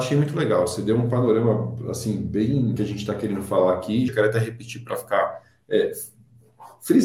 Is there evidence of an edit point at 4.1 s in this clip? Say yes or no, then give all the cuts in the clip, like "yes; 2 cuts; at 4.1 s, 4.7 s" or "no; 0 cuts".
yes; 2 cuts; at 2.8 s, 4.1 s